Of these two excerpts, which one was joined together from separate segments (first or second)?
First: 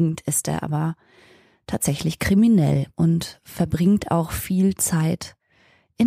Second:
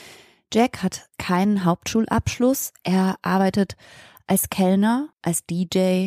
second